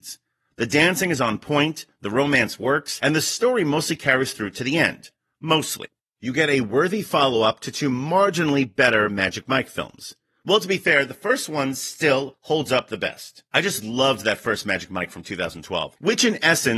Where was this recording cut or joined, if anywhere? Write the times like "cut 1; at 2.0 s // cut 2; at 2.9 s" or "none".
none